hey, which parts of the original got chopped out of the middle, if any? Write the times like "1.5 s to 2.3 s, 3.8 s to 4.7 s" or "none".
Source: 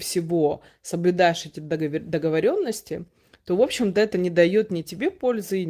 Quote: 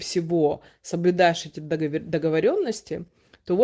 none